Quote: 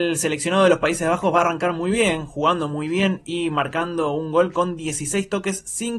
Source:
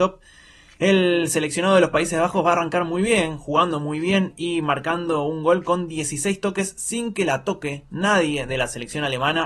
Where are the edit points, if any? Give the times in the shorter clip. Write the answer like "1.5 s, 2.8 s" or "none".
none